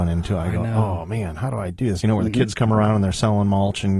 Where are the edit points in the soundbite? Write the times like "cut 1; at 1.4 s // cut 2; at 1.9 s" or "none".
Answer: cut 1; at 2.0 s